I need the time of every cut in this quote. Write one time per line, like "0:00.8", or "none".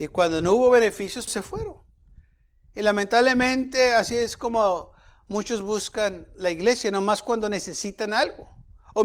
0:01.3